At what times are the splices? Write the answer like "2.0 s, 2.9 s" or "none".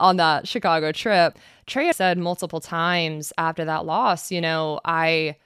1.9 s